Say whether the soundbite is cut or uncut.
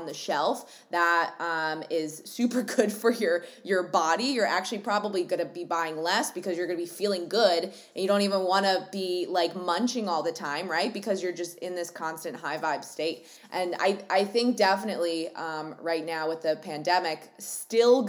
uncut